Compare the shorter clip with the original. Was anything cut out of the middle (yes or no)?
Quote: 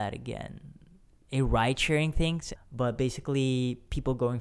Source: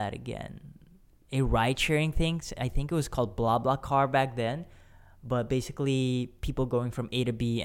yes